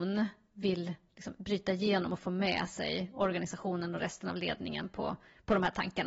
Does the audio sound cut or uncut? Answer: uncut